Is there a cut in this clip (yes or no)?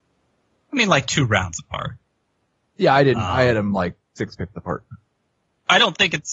no